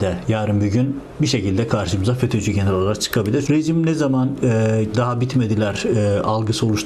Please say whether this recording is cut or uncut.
cut